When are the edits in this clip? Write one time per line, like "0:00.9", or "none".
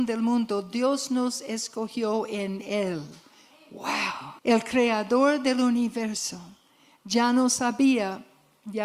0:04.4